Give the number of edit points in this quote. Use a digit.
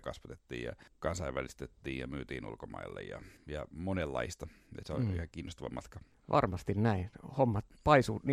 0